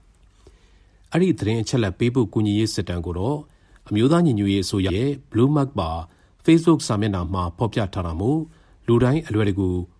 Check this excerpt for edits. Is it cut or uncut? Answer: cut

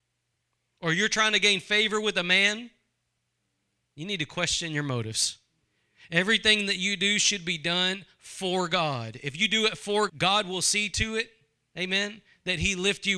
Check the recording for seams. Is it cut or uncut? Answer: cut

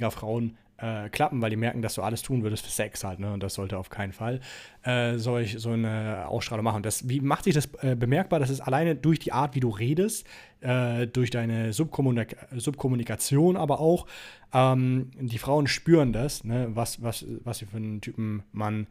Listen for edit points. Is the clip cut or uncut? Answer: uncut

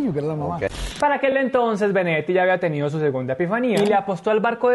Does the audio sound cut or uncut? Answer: uncut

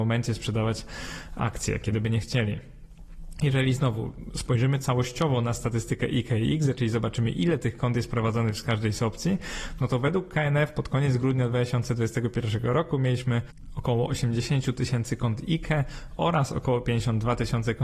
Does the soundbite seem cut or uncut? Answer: uncut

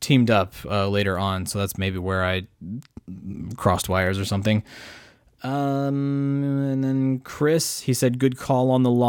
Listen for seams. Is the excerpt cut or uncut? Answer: uncut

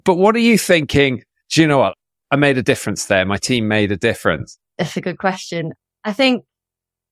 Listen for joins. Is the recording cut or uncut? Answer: uncut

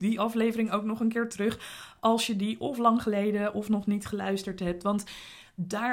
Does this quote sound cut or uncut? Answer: uncut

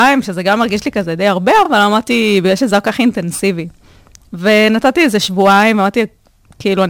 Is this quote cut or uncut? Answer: uncut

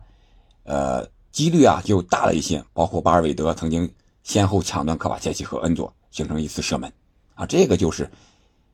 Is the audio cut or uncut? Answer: uncut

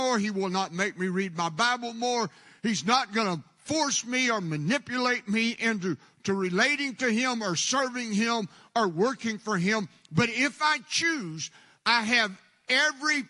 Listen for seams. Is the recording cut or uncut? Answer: uncut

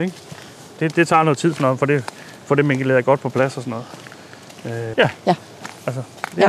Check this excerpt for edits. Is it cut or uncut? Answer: cut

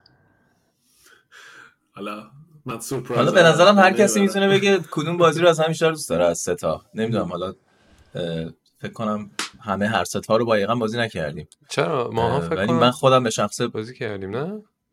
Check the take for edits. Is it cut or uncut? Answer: uncut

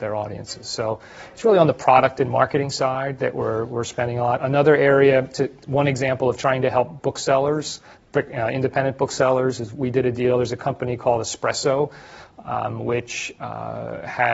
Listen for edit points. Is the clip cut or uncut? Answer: uncut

